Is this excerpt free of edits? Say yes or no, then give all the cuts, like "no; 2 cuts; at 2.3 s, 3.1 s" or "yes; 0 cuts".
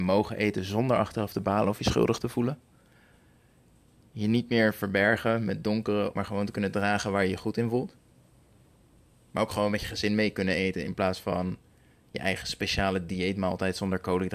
no; 1 cut; at 6.2 s